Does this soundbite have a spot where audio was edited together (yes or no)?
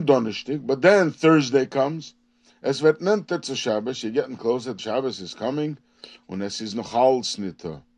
yes